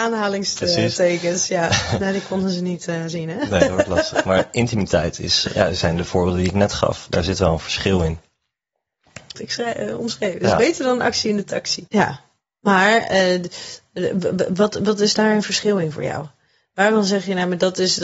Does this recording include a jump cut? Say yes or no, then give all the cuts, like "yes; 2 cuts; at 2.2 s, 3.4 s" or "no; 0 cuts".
yes; 2 cuts; at 9.3 s, 11.9 s